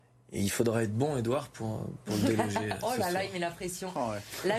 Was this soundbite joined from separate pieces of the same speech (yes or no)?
no